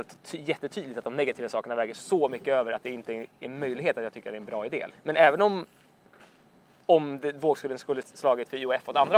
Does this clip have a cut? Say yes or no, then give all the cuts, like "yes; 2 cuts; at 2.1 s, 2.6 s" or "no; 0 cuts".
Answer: yes; 2 cuts; at 4.9 s, 8.0 s